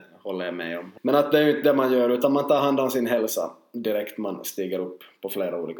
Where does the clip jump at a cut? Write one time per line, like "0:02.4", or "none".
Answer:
0:01.0